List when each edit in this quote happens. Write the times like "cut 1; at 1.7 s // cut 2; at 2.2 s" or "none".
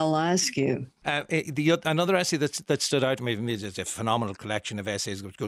cut 1; at 1.0 s